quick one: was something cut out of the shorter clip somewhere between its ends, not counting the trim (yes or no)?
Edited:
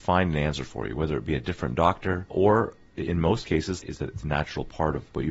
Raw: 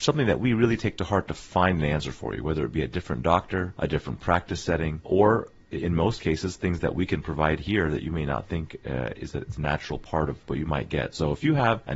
yes